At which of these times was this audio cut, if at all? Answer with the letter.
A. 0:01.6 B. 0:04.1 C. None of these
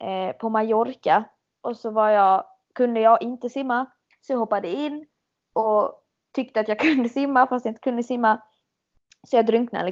A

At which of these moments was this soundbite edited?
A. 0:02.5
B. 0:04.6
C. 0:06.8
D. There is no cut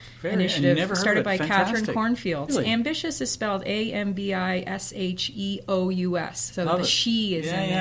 A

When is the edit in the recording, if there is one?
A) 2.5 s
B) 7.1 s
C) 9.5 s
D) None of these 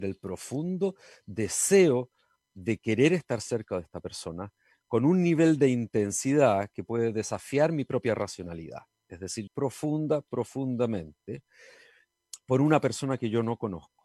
C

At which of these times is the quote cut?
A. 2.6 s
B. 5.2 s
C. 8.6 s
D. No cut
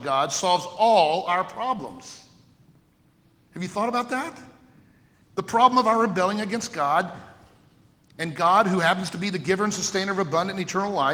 B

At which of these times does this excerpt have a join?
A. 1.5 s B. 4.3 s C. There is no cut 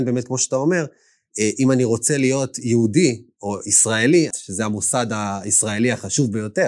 B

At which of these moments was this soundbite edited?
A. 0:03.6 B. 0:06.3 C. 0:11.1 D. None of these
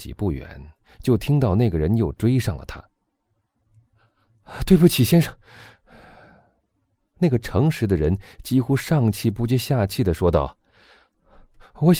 A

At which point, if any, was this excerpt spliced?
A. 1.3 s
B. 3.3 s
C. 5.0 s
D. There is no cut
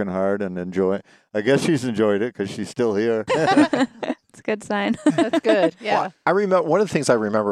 B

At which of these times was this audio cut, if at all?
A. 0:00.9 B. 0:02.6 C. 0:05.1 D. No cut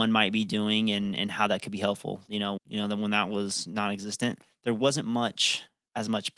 B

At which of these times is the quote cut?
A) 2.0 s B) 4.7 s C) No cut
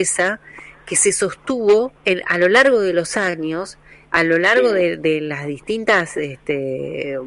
A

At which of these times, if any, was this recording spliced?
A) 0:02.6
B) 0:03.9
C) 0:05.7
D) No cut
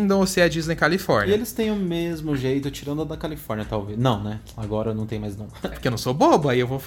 C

